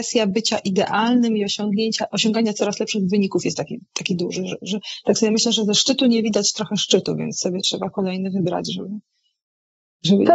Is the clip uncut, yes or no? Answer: yes